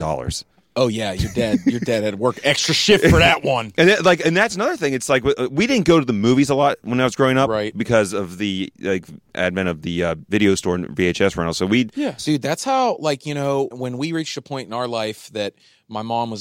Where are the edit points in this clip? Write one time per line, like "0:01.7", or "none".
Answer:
0:12.2
0:13.7